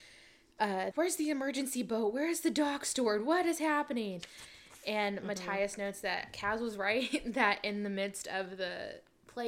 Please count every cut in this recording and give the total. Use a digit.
1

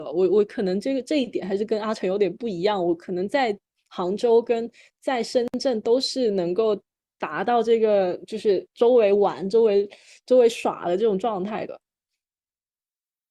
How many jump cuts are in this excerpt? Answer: 0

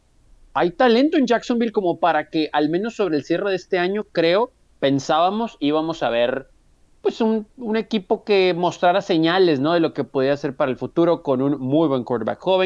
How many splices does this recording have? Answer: 0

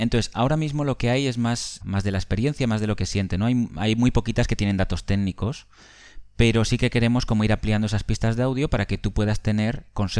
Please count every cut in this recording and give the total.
1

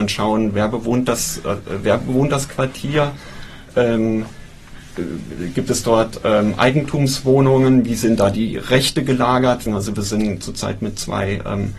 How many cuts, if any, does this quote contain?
1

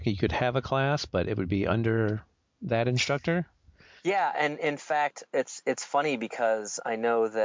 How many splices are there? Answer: 1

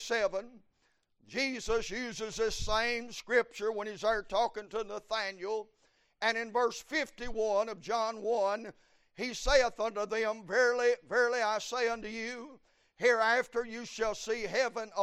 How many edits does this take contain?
0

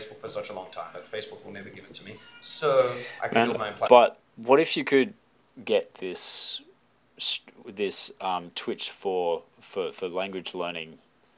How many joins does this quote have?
1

